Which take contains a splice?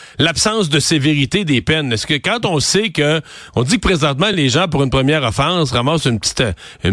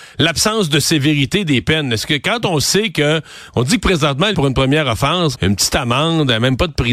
second; 2 cuts; at 4.3 s, 5.3 s

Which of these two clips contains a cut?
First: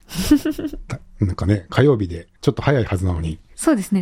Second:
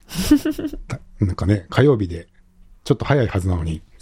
first; 1 cut; at 2.4 s

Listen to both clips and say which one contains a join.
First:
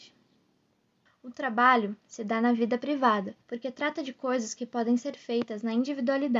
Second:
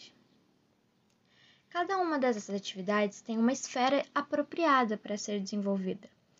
first; 2 cuts; at 1.1 s, 3.4 s

